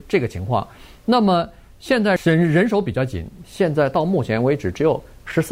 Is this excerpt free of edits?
no; 2 cuts; at 2.2 s, 3.4 s

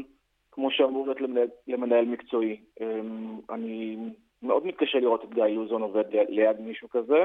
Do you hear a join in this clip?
no; 0 cuts

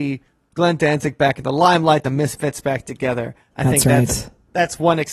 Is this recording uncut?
yes; 0 cuts

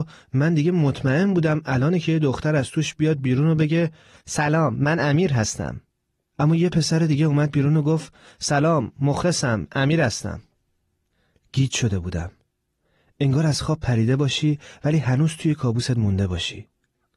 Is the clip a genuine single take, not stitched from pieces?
yes; 0 cuts

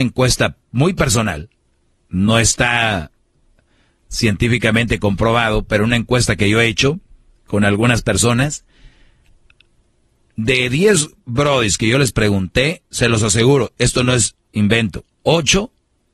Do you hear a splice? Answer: no; 0 cuts

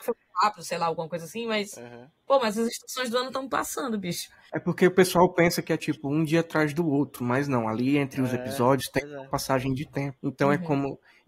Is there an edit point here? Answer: no; 0 cuts

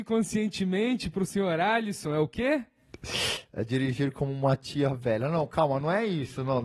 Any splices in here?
no; 0 cuts

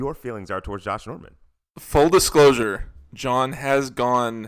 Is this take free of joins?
yes; 0 cuts

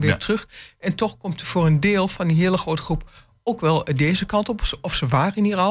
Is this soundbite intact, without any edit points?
yes; 0 cuts

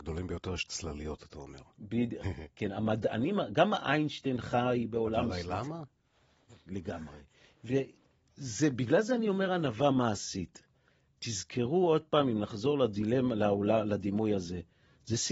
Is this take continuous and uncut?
no; 1 cut; at 2.2 s

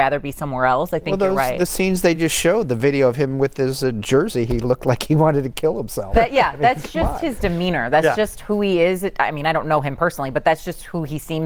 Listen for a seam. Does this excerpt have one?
no; 0 cuts

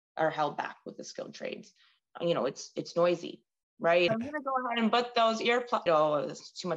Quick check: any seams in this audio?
yes; 2 cuts; at 4.1 s, 5.9 s

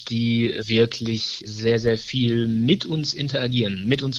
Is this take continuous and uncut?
yes; 0 cuts

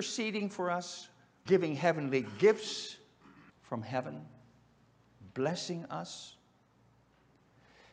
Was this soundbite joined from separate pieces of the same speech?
yes; 2 cuts; at 1.5 s, 3.5 s

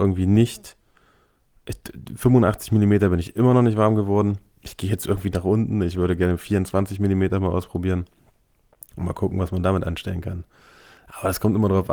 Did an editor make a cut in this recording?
no; 0 cuts

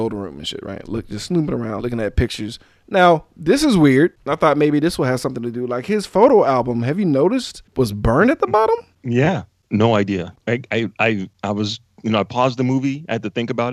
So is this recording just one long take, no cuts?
no; 1 cut; at 1.8 s

